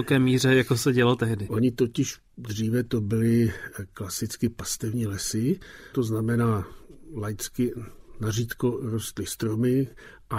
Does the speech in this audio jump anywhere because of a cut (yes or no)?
yes